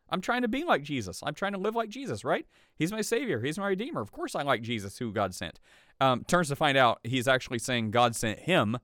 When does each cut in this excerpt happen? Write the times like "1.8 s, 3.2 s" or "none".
none

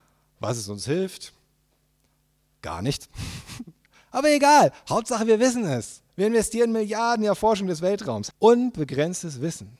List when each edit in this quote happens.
6.1 s, 8.3 s

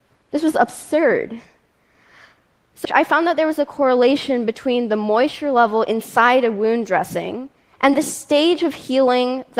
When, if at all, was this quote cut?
2.8 s

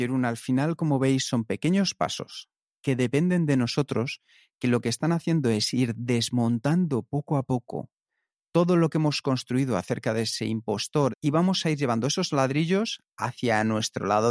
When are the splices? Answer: 11.1 s

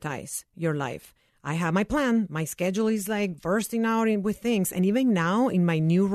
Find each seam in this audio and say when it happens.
1.3 s

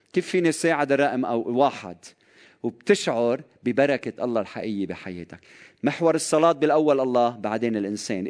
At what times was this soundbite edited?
none

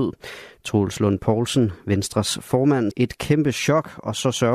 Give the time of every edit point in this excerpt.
2.9 s

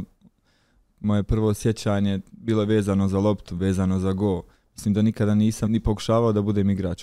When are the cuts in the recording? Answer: 5.7 s

